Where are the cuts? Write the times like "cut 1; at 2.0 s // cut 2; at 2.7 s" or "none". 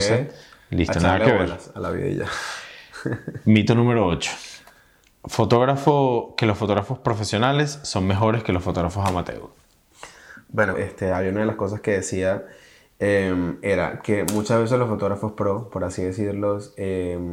cut 1; at 10.7 s